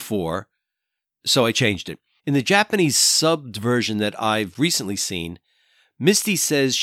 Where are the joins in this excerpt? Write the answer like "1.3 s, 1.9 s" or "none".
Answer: 2.2 s